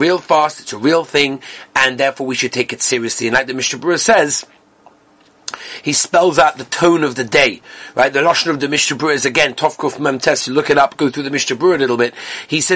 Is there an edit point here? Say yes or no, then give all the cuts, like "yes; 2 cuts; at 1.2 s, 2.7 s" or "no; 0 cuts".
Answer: no; 0 cuts